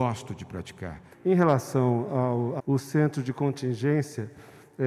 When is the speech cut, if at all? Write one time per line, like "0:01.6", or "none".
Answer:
0:01.1
0:02.6